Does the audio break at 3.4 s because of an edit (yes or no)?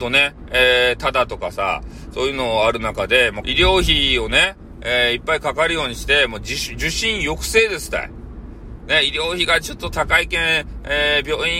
yes